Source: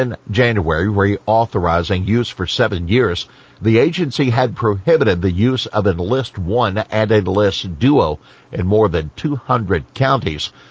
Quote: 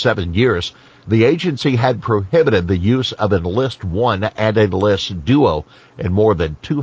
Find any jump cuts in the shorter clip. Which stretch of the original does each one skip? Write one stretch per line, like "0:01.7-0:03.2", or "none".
none